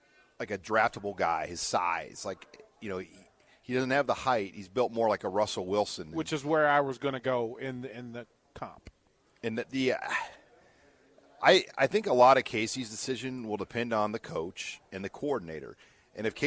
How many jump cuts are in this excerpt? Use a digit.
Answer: 0